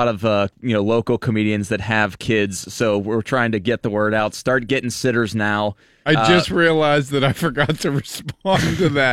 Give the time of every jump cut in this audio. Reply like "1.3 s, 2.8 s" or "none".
none